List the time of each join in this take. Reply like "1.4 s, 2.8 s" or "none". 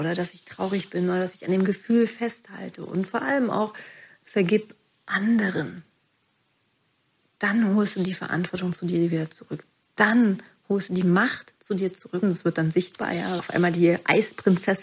12.2 s, 13.4 s